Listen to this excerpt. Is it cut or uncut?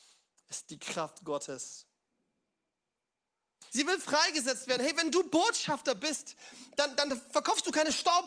cut